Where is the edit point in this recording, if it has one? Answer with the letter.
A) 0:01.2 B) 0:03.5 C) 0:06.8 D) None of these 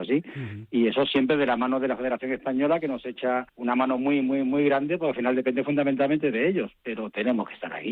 B